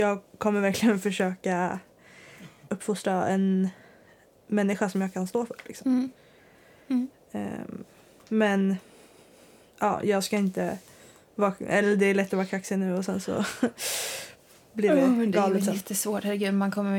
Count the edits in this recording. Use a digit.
1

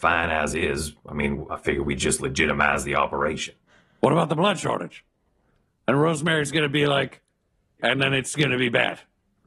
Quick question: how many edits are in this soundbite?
2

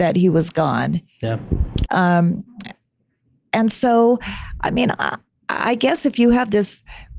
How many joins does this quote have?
1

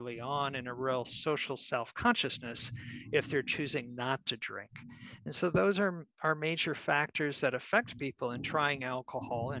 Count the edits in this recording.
0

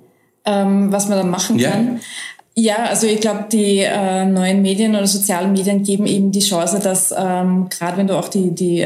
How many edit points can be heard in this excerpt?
0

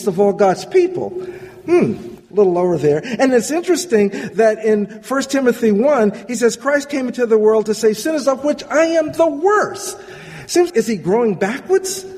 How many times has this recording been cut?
1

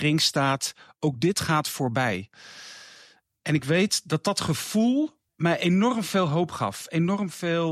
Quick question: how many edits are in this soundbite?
1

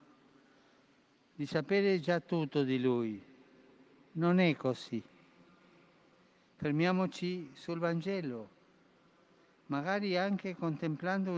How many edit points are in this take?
0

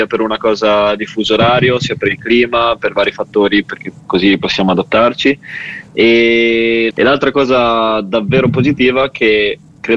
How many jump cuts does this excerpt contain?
1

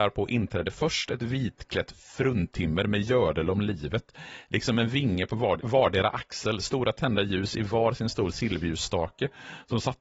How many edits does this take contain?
1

